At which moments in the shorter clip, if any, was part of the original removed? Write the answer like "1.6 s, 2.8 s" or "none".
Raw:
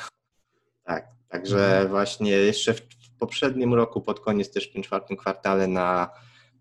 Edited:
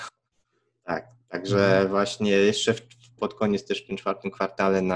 3.2 s